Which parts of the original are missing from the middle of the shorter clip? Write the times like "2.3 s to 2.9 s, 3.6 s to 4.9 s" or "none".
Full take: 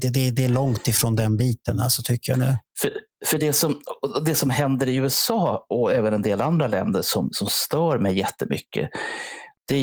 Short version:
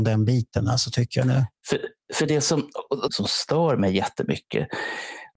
4.2 s to 7.3 s